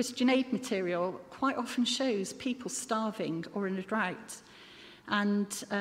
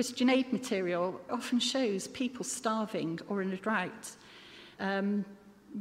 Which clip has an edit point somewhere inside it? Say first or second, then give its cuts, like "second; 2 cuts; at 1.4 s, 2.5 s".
second; 2 cuts; at 1.3 s, 4.8 s